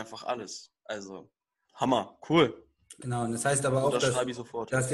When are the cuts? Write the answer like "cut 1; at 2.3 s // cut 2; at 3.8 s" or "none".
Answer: cut 1; at 1.6 s